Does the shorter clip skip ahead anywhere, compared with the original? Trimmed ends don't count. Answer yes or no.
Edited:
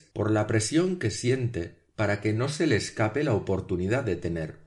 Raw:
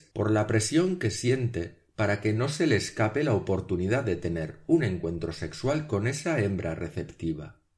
no